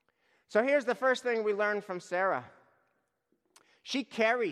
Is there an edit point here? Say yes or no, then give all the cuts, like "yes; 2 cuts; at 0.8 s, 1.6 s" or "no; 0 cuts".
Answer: no; 0 cuts